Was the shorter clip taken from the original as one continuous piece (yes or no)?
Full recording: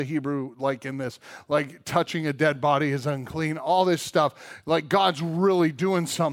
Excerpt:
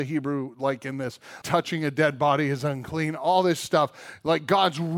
no